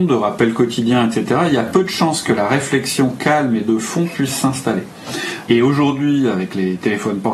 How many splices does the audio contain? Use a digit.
1